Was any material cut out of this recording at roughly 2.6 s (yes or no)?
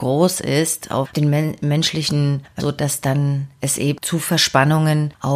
yes